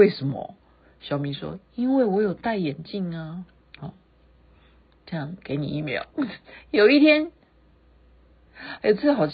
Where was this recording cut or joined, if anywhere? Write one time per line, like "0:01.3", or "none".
none

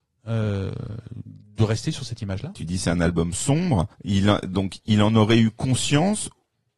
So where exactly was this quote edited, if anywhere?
0:02.5
0:03.9

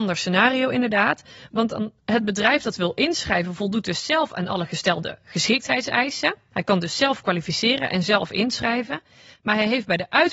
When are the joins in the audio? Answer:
none

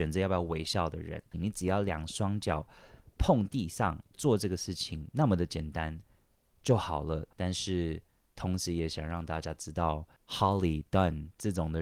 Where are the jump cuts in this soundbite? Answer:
0:01.3
0:04.1
0:07.3

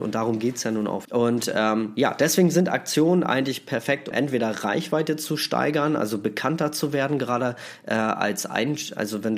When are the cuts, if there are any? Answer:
0:01.1
0:04.1

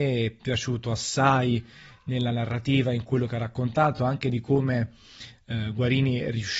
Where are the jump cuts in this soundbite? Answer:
none

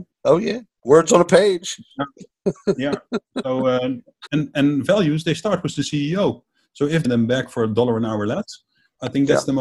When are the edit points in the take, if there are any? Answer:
0:04.3
0:07.1

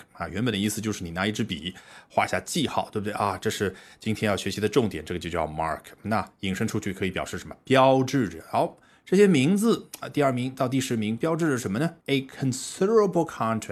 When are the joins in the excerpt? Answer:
0:12.0

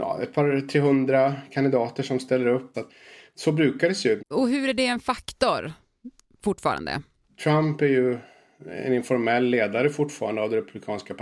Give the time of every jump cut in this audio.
0:02.7
0:04.2

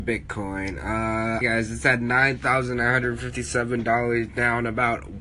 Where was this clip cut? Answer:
0:01.4

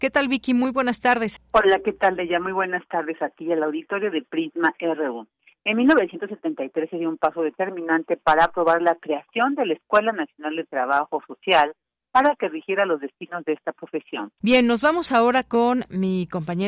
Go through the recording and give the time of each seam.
0:01.4
0:14.4

